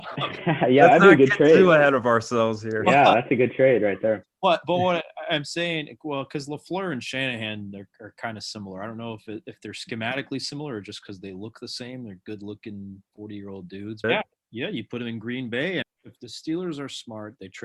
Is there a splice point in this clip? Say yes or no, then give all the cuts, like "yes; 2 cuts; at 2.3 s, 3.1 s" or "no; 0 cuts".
yes; 2 cuts; at 14.0 s, 15.8 s